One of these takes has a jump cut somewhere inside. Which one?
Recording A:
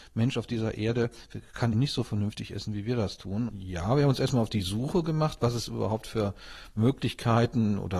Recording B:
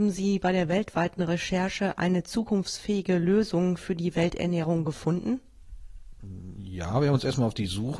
A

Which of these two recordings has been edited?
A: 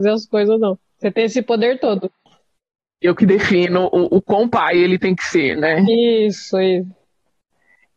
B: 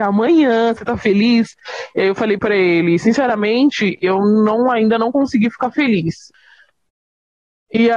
A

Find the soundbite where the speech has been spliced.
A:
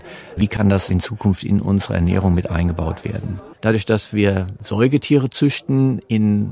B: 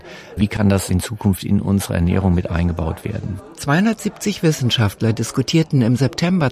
A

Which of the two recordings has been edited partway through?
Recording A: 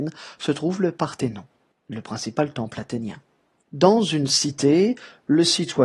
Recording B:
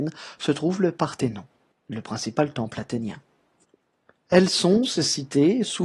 A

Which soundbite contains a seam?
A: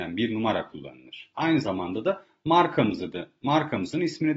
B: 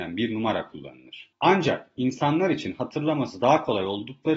A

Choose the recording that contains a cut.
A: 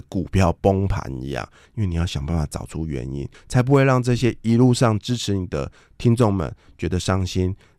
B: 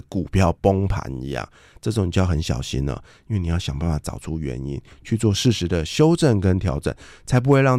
A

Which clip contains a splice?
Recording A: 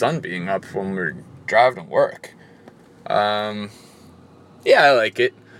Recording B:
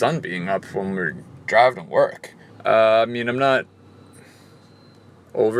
B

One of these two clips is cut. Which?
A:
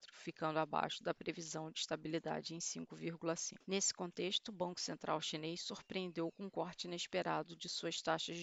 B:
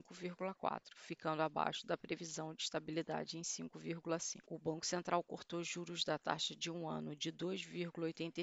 B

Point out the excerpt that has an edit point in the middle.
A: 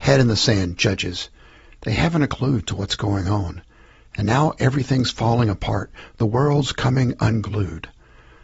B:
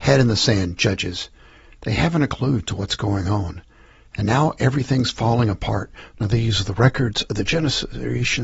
B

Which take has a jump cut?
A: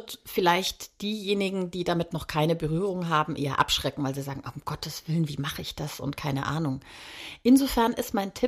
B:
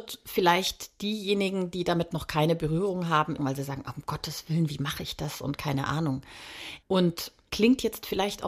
B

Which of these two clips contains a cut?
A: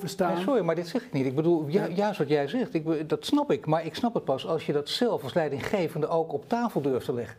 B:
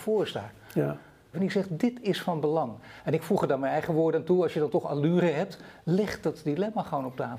B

